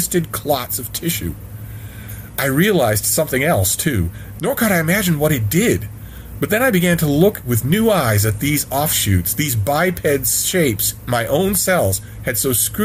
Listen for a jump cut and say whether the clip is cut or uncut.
cut